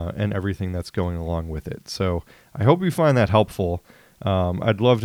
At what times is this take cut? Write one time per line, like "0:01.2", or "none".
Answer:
none